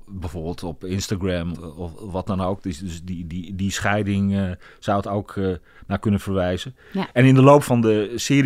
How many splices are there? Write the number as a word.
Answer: one